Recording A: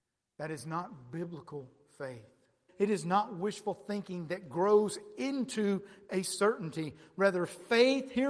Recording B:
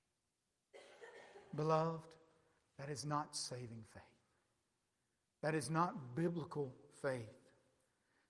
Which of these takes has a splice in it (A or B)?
A